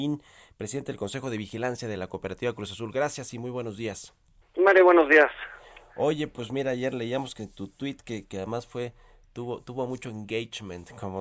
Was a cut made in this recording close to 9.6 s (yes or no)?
no